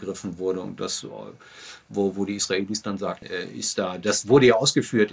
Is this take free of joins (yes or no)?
no